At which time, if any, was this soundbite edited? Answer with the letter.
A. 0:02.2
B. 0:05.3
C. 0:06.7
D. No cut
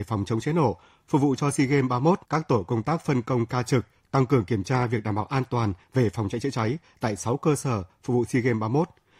A